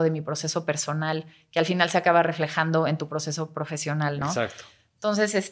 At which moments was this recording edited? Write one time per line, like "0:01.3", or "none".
none